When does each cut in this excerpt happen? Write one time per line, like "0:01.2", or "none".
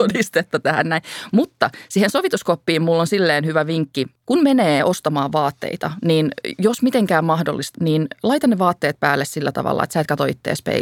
0:04.2
0:07.7